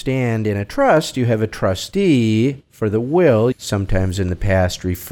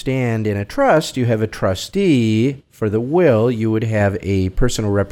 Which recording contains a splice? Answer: first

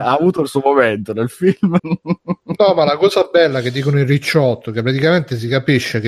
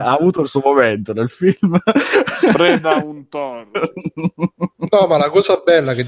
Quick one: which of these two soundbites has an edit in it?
first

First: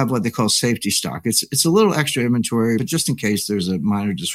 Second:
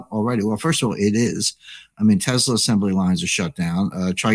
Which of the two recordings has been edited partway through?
first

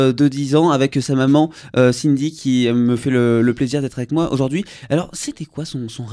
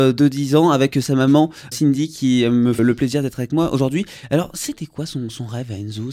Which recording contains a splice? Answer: second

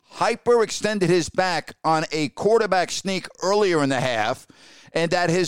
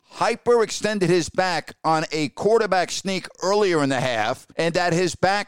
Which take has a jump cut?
second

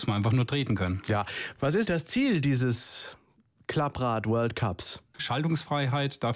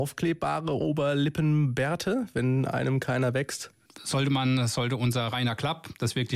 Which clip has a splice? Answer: first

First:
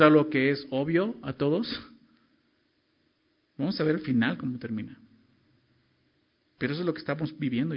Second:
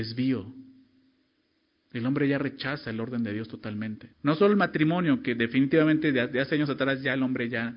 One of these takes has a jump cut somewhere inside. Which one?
second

